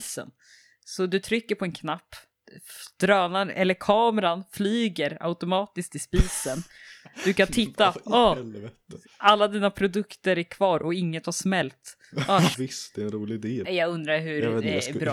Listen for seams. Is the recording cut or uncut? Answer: cut